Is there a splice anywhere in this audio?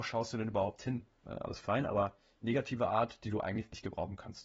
yes; 1 cut; at 1.2 s

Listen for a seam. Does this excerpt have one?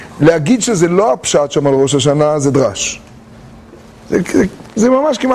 no; 0 cuts

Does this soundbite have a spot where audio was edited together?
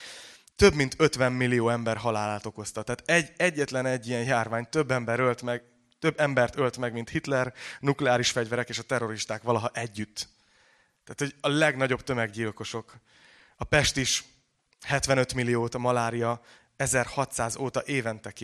no; 0 cuts

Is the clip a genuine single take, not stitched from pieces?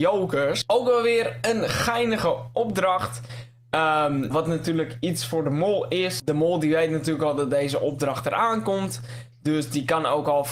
no; 1 cut; at 4.3 s

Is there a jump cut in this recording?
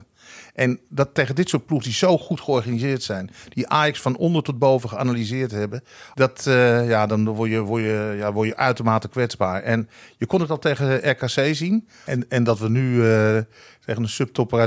yes; 2 cuts; at 6.1 s, 12.1 s

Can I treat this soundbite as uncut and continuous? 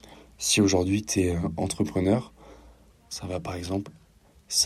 no; 1 cut; at 2.9 s

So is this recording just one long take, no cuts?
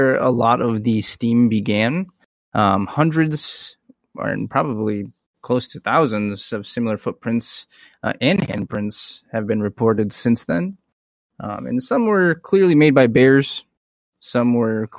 yes; 0 cuts

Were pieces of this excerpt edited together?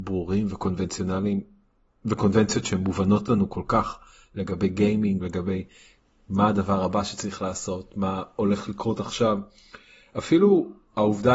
yes; 1 cut; at 5.2 s

